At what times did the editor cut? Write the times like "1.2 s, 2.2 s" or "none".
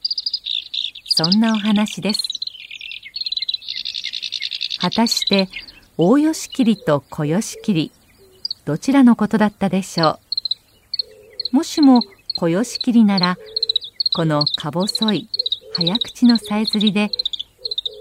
5.9 s

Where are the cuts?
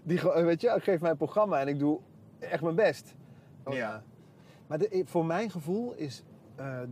3.7 s

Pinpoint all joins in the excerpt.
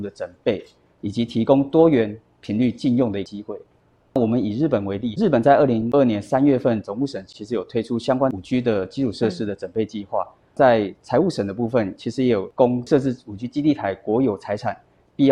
5.9 s

